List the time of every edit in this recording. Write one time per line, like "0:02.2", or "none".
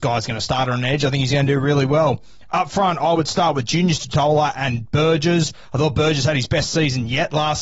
none